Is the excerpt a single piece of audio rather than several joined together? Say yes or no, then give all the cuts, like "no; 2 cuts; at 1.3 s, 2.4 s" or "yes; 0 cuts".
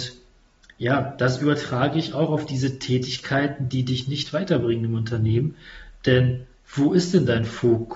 yes; 0 cuts